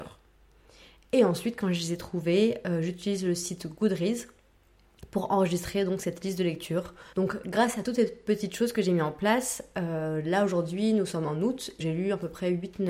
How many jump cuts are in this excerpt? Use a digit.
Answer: 2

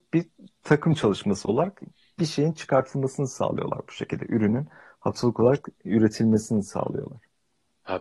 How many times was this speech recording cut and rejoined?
0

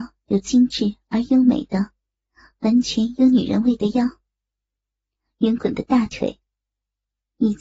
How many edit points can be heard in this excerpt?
1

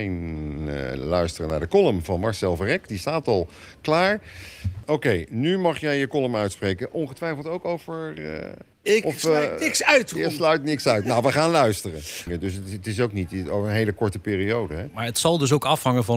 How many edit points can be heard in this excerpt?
2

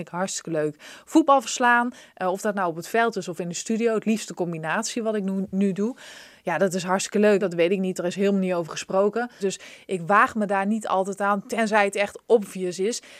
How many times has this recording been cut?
2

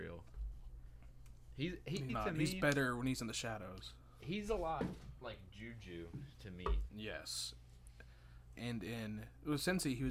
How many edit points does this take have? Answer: 3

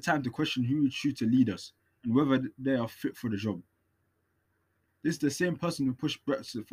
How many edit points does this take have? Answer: 1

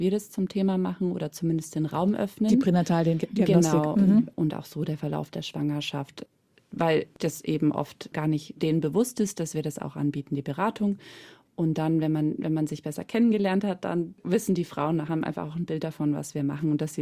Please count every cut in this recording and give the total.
1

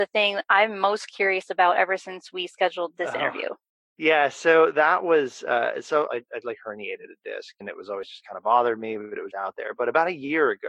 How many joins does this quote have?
3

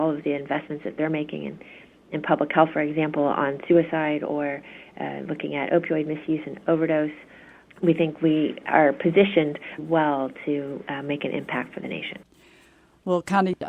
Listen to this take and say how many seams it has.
1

